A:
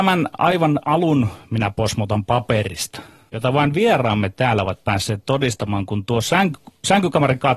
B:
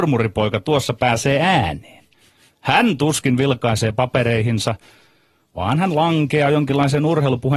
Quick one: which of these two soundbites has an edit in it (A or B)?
A